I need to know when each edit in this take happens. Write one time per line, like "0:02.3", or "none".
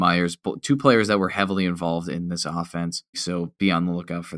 0:03.1